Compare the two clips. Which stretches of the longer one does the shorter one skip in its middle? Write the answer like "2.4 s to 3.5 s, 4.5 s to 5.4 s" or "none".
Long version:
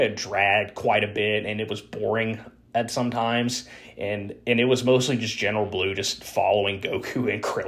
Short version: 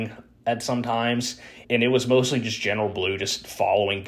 3.9 s to 4.4 s